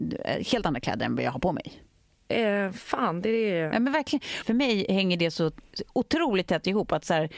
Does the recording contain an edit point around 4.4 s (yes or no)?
yes